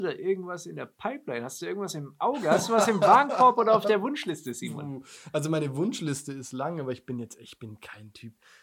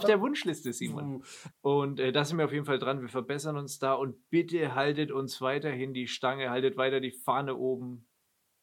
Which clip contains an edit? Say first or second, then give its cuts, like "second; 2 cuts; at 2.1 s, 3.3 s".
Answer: second; 1 cut; at 1.5 s